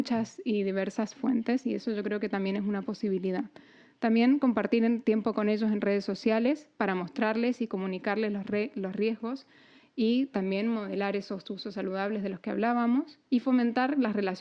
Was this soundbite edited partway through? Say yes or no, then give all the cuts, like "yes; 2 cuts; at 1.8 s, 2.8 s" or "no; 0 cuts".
yes; 1 cut; at 13.3 s